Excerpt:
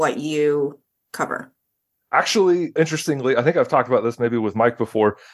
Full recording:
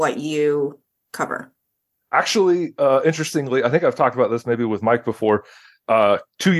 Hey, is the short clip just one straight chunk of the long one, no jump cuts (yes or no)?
no